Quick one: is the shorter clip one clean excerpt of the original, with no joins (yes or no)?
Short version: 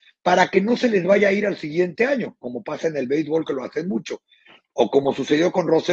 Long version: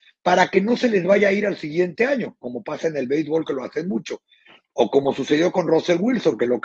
yes